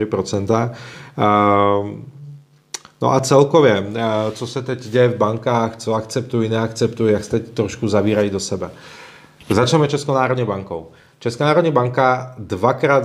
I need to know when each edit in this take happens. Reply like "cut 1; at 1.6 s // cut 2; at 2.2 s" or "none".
none